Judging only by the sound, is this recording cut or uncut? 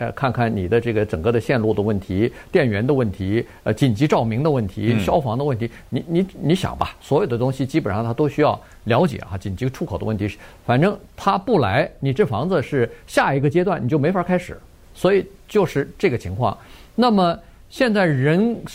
uncut